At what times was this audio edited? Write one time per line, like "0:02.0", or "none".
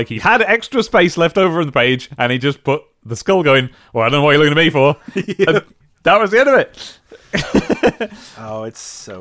none